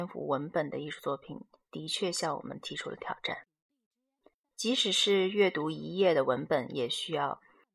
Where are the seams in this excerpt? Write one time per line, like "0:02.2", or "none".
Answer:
none